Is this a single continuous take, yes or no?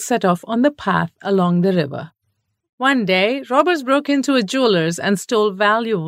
no